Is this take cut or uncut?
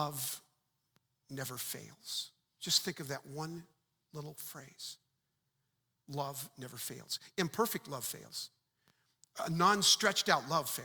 uncut